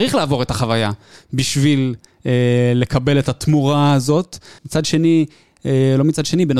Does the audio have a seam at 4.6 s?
yes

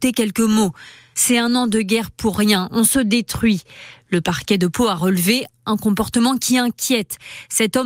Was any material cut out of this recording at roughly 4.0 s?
no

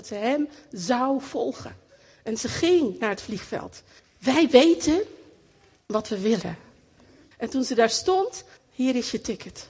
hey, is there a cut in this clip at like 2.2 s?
no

